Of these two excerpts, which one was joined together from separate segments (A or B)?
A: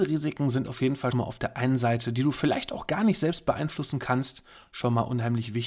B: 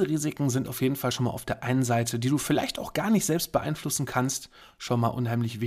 A